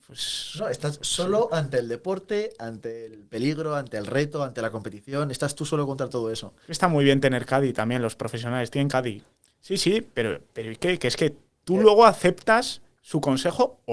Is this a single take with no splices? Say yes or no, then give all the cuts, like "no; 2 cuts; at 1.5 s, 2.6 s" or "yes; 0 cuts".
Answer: yes; 0 cuts